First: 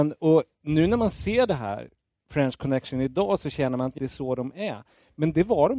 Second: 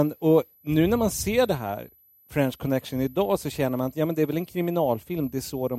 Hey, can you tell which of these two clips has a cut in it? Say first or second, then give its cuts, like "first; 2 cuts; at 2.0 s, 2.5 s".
first; 1 cut; at 4.0 s